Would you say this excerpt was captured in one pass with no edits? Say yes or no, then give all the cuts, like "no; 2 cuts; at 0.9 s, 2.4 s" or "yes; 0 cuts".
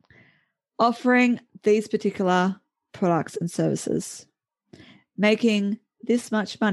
yes; 0 cuts